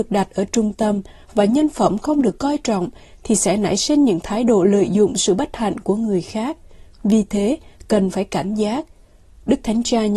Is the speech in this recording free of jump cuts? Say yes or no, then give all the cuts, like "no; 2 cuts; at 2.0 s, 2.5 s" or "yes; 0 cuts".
yes; 0 cuts